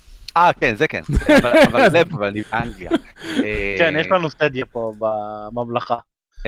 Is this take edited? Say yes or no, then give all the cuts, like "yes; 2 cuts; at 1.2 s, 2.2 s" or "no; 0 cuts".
yes; 1 cut; at 1.9 s